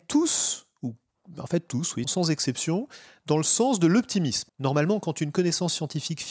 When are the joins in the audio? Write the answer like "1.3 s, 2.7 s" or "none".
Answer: 2.0 s, 4.5 s